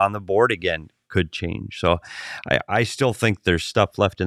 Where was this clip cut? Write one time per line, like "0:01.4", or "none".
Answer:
none